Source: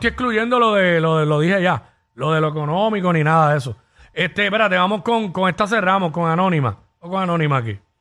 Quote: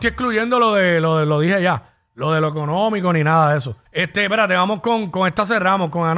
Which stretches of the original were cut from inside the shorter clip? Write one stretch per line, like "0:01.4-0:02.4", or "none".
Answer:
0:03.8-0:04.1